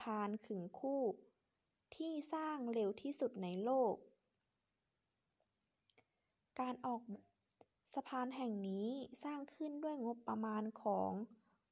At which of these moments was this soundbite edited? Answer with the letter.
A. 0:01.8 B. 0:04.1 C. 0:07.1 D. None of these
C